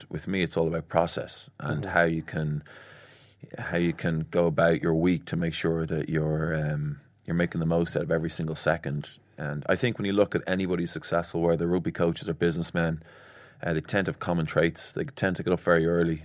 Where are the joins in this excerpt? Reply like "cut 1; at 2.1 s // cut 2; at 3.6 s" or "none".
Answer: none

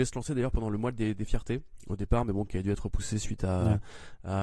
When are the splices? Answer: none

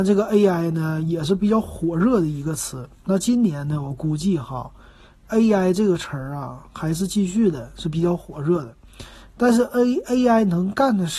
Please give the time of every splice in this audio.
none

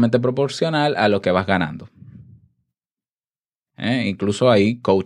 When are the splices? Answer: cut 1; at 3.7 s

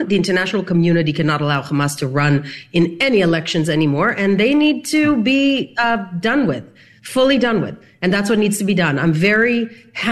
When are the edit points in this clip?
none

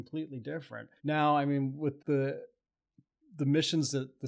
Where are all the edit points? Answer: cut 1; at 1.0 s // cut 2; at 2.0 s

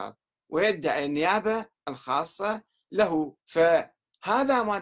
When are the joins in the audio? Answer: cut 1; at 3.4 s

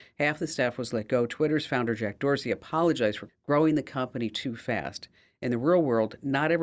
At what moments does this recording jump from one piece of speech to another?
cut 1; at 3.3 s

